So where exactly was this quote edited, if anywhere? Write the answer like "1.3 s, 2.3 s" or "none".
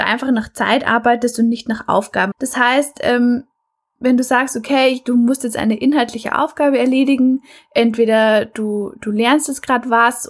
2.3 s

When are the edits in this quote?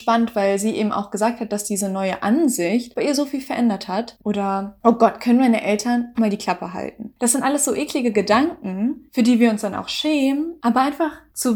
4.2 s, 6.1 s

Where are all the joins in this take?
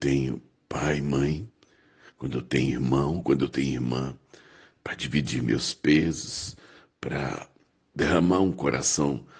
none

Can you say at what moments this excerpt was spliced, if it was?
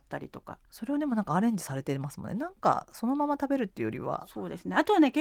none

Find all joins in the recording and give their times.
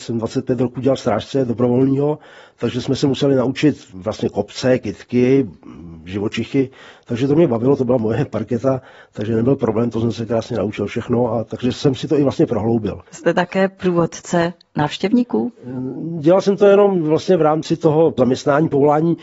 13.1 s

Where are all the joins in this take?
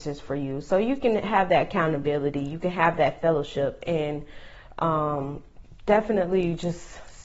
none

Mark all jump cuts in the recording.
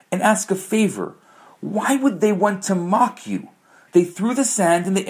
3.9 s

